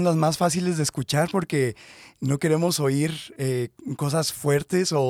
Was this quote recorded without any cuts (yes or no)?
yes